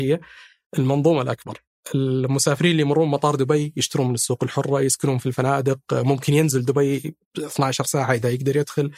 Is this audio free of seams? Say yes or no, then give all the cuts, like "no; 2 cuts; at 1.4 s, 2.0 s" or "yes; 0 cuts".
yes; 0 cuts